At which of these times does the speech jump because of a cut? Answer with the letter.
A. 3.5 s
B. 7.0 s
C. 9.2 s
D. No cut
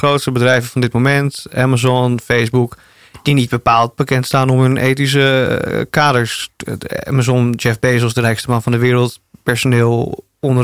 D